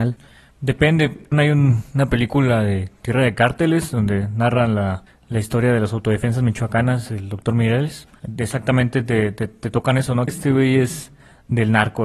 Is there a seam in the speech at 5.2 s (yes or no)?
no